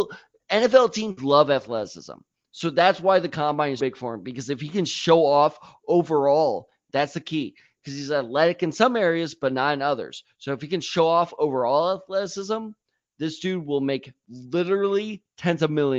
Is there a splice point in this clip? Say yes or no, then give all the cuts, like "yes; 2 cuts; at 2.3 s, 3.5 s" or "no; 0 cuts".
yes; 1 cut; at 3.8 s